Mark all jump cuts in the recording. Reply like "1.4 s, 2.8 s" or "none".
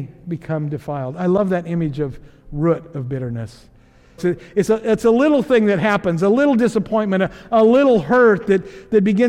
4.2 s